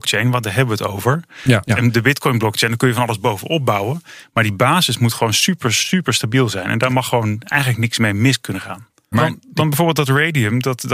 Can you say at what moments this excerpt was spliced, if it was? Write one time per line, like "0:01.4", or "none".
0:01.6
0:09.1